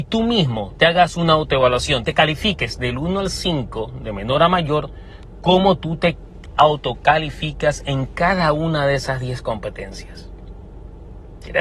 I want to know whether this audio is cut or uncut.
uncut